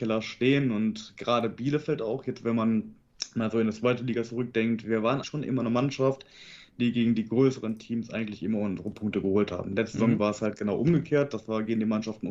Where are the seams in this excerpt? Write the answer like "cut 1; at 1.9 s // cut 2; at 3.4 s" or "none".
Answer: cut 1; at 5.2 s